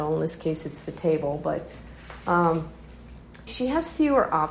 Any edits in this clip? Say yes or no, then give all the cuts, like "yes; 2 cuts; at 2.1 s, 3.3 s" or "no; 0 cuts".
yes; 1 cut; at 3.5 s